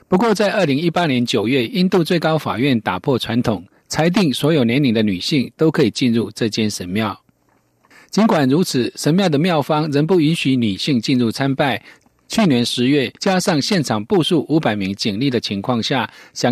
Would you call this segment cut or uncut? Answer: cut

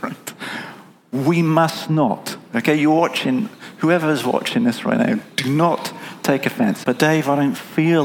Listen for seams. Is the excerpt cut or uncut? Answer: cut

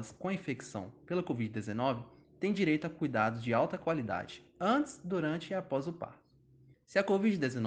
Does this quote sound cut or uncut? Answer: cut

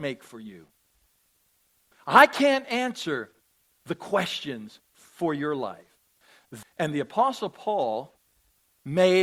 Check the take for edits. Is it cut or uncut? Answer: cut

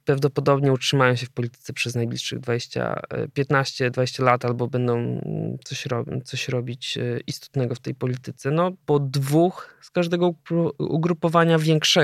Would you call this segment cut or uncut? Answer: cut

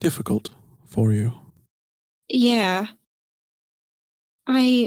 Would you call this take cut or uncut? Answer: uncut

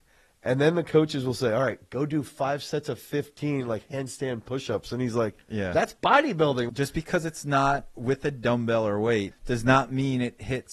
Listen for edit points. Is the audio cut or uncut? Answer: cut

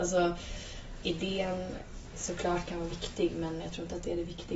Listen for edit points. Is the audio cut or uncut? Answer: cut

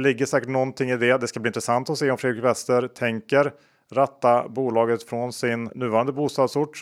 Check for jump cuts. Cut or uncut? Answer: cut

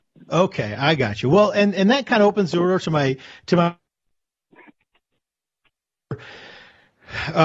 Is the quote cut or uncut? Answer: uncut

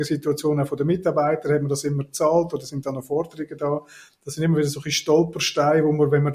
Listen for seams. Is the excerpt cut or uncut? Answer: uncut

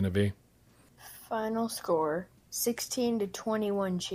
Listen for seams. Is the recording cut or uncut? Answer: cut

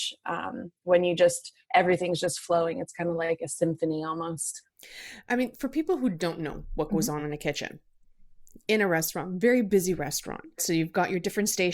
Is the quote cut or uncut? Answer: uncut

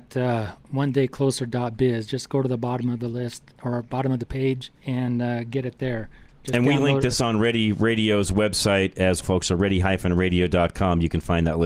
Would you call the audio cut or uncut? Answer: cut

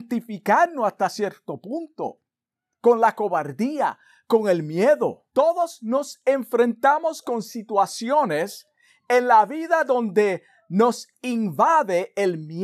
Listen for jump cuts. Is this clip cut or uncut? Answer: cut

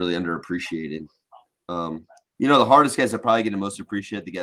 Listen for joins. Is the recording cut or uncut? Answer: uncut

